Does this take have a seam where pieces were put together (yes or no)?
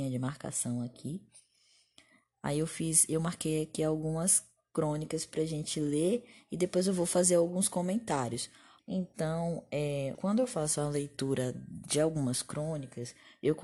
yes